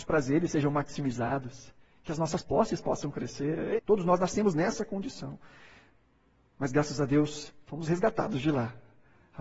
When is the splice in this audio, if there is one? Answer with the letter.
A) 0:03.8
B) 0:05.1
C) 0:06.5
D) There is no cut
A